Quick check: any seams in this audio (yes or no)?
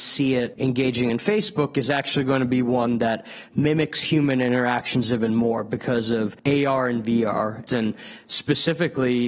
yes